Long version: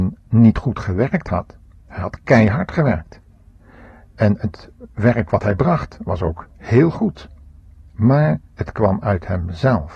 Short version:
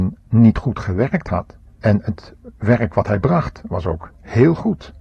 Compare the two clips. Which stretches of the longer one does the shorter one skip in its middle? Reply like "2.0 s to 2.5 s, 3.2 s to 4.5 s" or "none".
1.7 s to 4.0 s